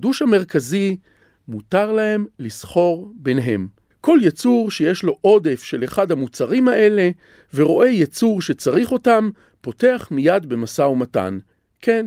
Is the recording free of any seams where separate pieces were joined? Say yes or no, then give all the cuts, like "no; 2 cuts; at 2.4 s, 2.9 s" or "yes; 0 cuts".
yes; 0 cuts